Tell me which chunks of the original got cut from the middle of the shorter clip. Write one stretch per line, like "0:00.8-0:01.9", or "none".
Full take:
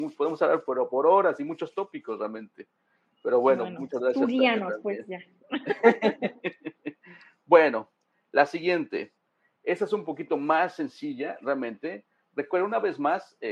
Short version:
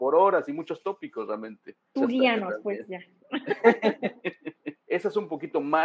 0:02.9-0:04.1
0:07.0-0:09.6